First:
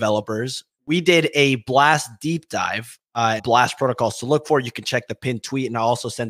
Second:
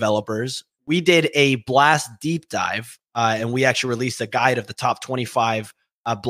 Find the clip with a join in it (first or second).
first